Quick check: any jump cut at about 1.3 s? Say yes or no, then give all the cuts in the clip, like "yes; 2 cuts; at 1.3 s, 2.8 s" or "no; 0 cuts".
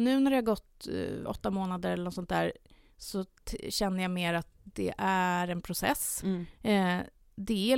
yes; 1 cut; at 1.3 s